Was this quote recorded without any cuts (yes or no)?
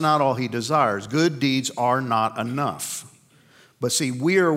yes